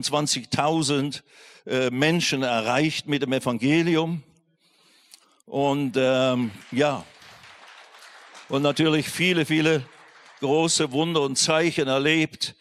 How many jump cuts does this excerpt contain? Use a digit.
0